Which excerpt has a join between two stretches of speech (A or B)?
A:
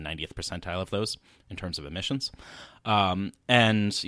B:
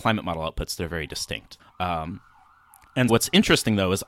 B